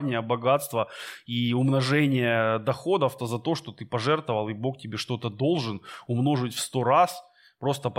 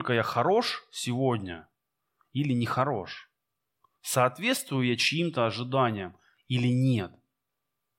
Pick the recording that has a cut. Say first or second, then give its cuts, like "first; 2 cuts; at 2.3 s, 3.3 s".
first; 1 cut; at 3.2 s